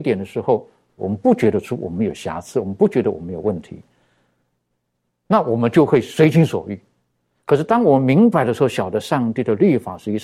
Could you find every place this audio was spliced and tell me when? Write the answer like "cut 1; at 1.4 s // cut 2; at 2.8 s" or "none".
cut 1; at 1.0 s